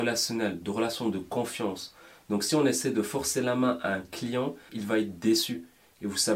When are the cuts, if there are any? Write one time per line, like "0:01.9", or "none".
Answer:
0:04.7